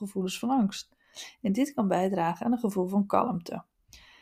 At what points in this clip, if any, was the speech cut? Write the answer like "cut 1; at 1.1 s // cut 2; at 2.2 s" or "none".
none